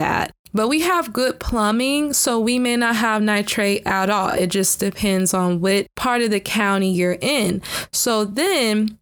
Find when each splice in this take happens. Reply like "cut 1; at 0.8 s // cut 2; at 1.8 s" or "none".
none